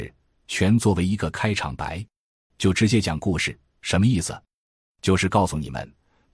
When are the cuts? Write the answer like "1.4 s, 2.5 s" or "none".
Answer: 2.5 s